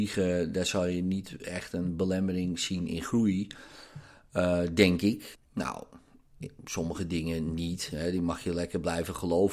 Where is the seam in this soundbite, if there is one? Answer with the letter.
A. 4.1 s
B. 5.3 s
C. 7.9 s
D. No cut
B